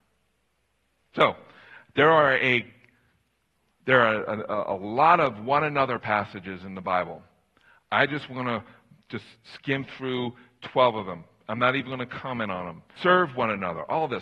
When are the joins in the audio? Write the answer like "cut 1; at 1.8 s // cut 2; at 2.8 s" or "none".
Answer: cut 1; at 13.0 s